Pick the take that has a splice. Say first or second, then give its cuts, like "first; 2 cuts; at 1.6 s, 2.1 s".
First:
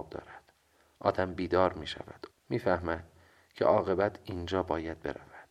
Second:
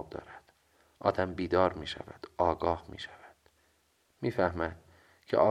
first; 1 cut; at 2.3 s